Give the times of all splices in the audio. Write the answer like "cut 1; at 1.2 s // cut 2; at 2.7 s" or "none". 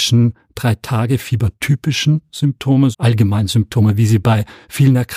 cut 1; at 2.9 s